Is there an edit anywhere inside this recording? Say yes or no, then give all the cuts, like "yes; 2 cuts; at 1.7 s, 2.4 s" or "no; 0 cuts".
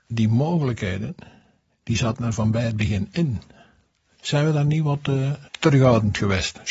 yes; 1 cut; at 5.5 s